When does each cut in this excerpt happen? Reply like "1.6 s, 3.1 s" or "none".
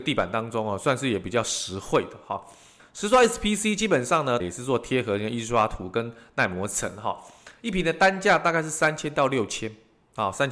2.8 s, 4.4 s